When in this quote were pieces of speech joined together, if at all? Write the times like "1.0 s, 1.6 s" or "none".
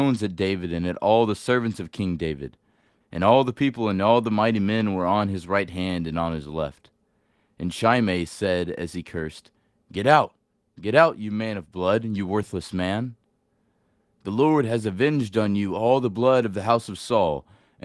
none